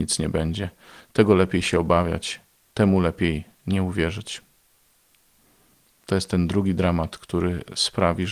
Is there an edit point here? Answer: no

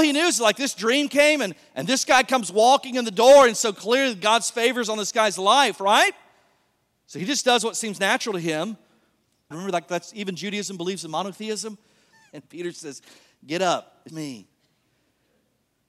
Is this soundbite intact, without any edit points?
no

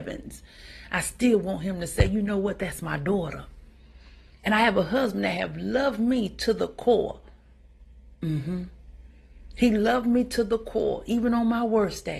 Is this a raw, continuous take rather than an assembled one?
yes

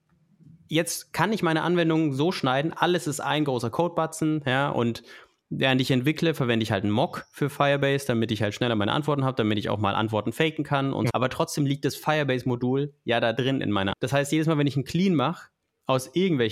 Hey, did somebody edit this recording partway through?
yes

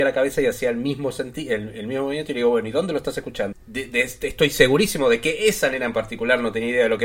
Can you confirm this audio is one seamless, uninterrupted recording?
no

